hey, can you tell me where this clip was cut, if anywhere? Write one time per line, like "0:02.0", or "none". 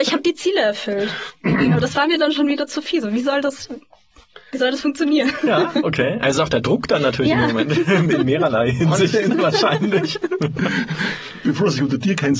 none